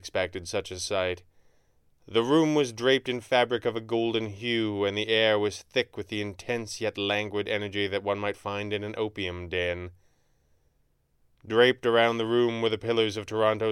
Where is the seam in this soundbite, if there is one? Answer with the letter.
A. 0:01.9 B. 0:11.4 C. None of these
C